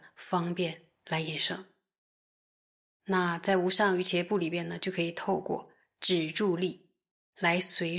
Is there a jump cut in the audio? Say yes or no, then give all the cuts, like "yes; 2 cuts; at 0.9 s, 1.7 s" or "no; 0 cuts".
no; 0 cuts